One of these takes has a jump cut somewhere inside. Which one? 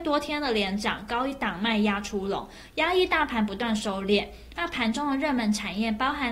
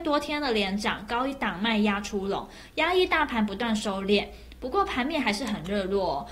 first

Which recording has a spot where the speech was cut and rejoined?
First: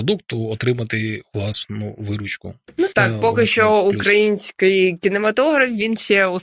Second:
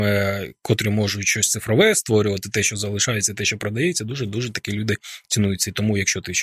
first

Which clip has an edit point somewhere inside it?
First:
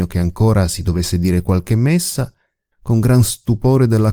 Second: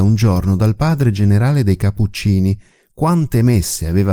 first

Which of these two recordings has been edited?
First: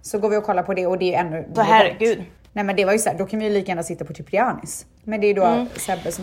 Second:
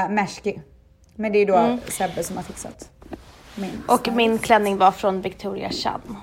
first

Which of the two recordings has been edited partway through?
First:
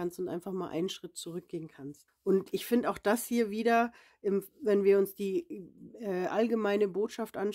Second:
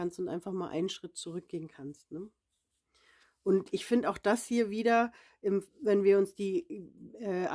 first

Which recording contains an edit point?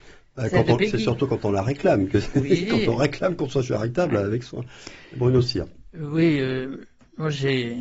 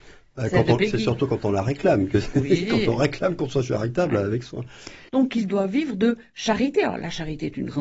second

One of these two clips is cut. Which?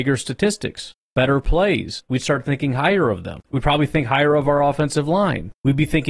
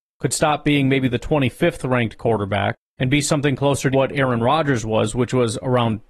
second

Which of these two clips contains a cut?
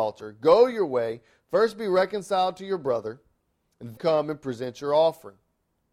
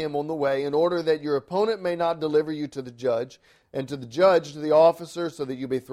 first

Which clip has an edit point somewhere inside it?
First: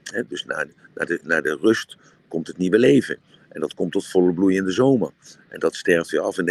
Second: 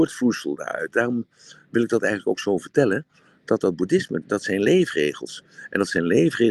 second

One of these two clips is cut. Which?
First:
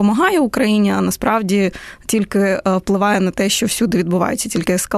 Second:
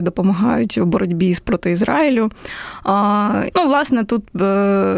second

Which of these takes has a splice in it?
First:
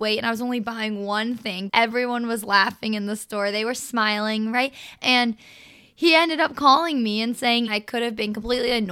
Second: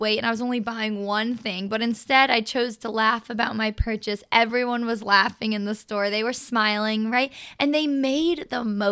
first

